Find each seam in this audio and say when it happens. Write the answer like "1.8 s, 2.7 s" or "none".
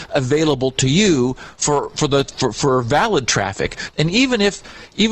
3.9 s